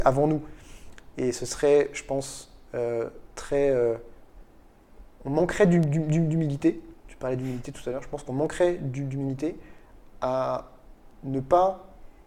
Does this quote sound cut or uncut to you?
uncut